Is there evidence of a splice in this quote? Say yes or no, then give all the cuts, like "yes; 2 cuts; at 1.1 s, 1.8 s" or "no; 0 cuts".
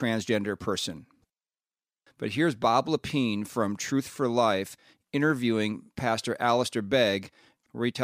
yes; 1 cut; at 2.1 s